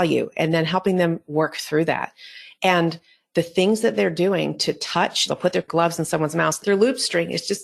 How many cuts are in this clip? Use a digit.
2